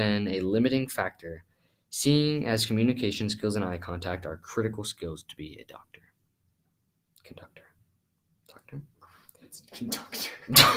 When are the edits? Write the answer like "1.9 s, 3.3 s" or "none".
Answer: none

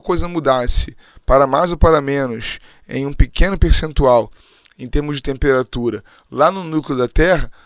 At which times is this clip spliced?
none

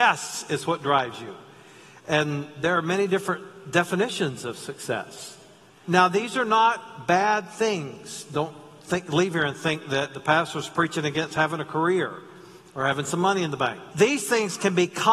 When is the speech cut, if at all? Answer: 5.8 s, 13.9 s

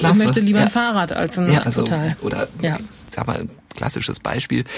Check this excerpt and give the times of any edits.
1.6 s

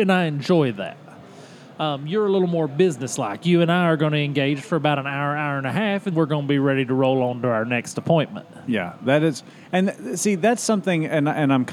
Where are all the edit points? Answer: 6.1 s

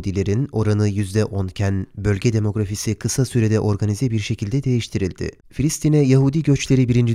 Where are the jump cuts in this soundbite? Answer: 5.4 s

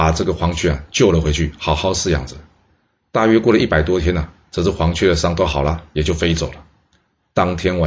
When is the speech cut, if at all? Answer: none

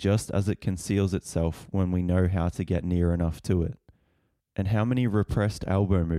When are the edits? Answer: 4.4 s

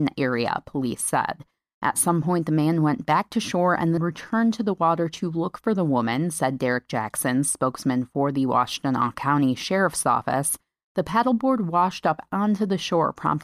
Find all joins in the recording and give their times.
4.0 s

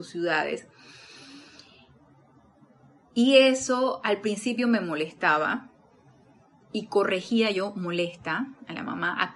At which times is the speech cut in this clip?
none

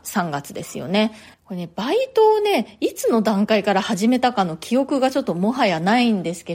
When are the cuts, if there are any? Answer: 1.3 s

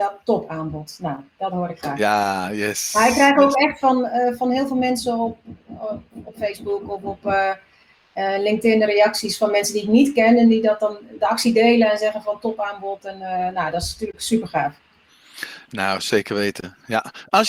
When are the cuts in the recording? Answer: none

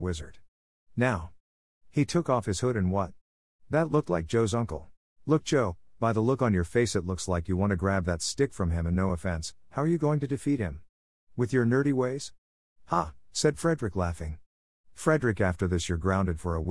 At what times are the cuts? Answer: 1.7 s, 5.1 s

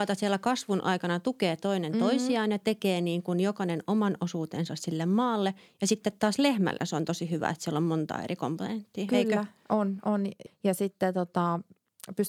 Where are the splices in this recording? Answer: 10.5 s

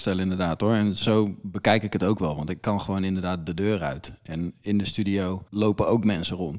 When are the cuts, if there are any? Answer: 5.5 s

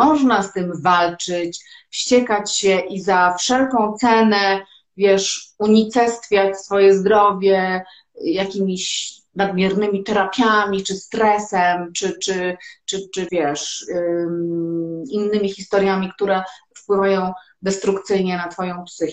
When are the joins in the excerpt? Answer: 13.3 s

